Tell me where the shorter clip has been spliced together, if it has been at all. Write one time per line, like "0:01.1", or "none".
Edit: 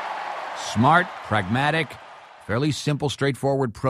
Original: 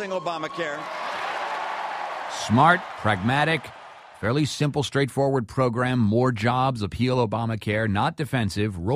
none